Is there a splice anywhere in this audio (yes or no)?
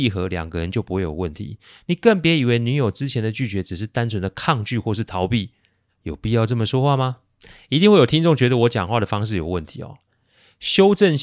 yes